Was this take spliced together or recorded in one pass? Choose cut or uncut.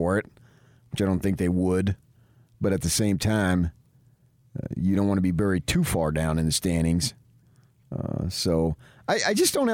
uncut